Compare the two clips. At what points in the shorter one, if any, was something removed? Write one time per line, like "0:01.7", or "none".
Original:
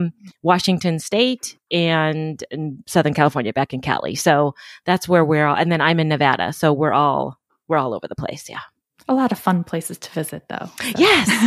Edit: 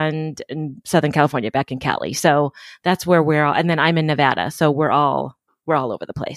none